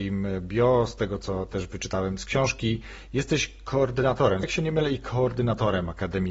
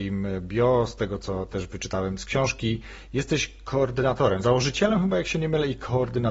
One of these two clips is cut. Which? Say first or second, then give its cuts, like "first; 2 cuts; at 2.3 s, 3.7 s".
first; 1 cut; at 4.4 s